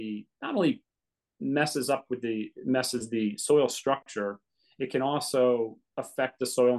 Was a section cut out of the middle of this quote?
yes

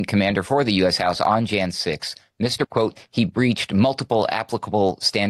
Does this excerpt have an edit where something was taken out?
yes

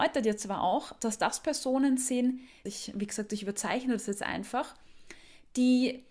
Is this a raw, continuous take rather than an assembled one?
no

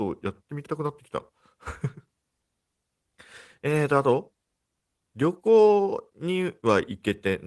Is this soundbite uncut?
yes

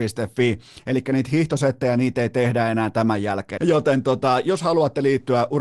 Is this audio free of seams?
no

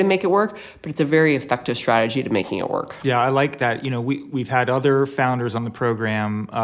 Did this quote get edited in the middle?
no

